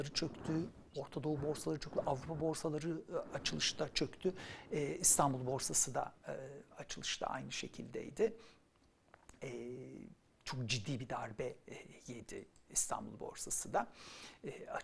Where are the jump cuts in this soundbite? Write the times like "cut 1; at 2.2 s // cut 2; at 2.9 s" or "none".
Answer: none